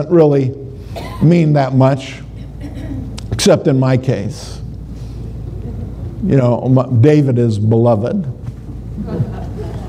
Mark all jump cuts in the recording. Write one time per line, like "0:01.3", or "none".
none